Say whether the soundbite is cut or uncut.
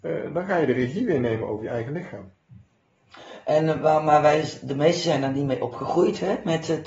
uncut